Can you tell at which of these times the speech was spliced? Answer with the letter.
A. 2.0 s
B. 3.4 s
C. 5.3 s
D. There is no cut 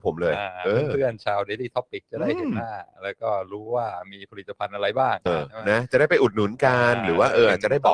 C